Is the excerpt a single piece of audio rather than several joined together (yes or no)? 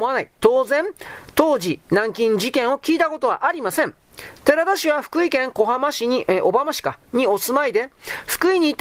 yes